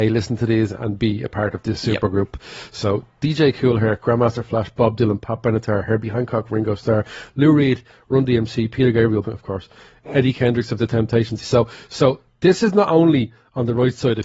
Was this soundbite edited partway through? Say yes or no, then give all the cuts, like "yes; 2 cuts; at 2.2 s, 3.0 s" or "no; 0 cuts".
yes; 2 cuts; at 9.2 s, 11.4 s